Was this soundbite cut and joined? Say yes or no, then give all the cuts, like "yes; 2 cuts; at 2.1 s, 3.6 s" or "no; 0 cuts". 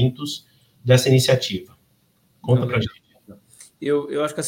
no; 0 cuts